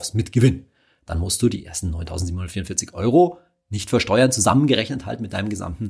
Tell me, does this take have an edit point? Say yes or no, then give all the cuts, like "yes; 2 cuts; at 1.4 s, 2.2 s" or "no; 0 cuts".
no; 0 cuts